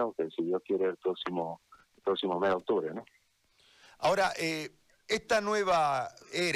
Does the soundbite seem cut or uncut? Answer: uncut